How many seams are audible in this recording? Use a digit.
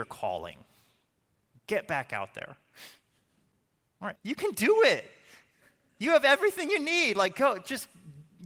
1